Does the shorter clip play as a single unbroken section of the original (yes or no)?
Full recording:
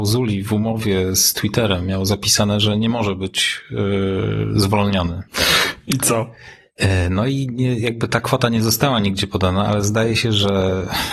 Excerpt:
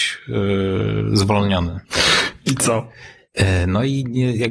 yes